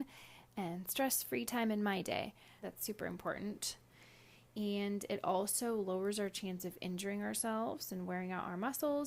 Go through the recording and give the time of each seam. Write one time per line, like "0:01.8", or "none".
0:02.6